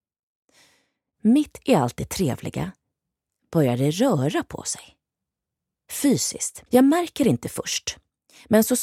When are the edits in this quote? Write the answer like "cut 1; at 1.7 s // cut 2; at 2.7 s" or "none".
cut 1; at 6.7 s

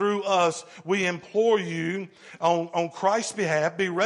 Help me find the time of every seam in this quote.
none

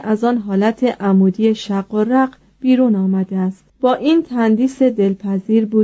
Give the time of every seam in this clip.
cut 1; at 3.7 s

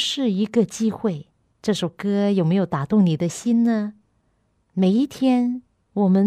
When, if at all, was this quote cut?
cut 1; at 1.5 s // cut 2; at 4.5 s

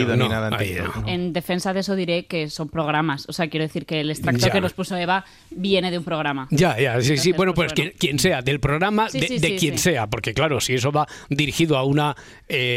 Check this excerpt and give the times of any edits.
none

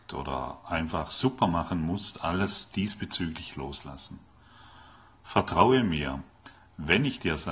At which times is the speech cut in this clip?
none

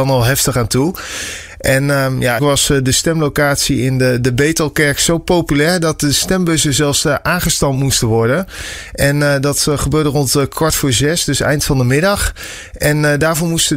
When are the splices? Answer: cut 1; at 2.4 s

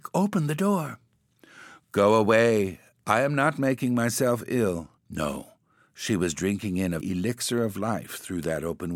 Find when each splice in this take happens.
cut 1; at 5.0 s // cut 2; at 7.0 s

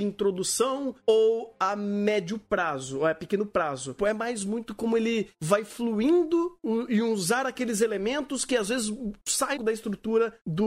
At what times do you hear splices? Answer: cut 1; at 4.0 s // cut 2; at 9.6 s

